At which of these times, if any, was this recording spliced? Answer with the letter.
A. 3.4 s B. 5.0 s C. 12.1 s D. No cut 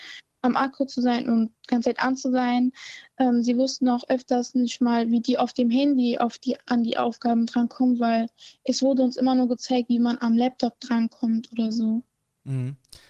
D